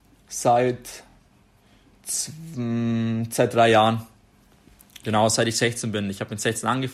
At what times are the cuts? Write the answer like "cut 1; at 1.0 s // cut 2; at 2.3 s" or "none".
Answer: none